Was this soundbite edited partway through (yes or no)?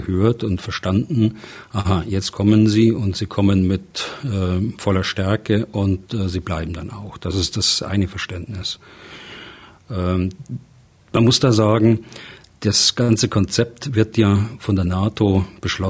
no